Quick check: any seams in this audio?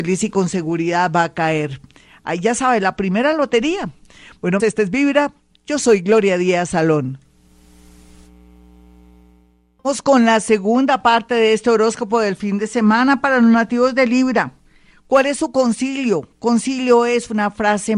yes; 1 cut; at 4.6 s

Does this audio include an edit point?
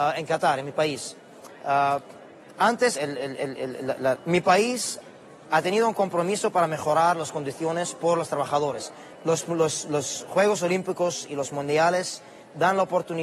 yes; 3 cuts; at 3.0 s, 4.2 s, 9.1 s

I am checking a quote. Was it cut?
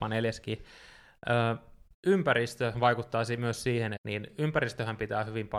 yes; 2 cuts; at 1.9 s, 4.0 s

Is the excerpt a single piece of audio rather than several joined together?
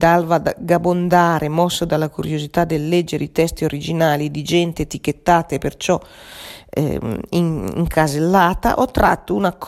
yes; 0 cuts

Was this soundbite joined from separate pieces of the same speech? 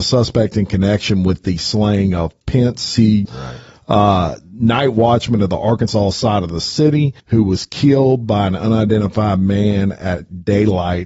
yes; 2 cuts; at 3.3 s, 7.2 s

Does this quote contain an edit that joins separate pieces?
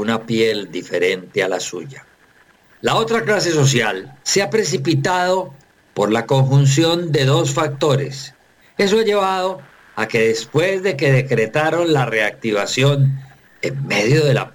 yes; 2 cuts; at 4.2 s, 8.6 s

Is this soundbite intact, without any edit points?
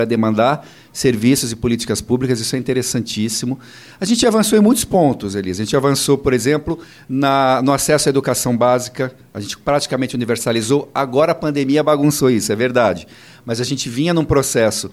yes; 0 cuts

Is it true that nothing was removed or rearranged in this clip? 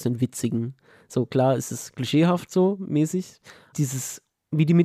no; 1 cut; at 3.7 s

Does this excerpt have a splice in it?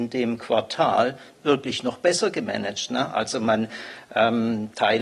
no; 0 cuts

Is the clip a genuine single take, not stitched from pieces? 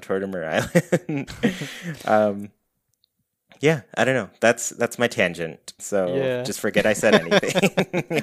no; 1 cut; at 5.8 s

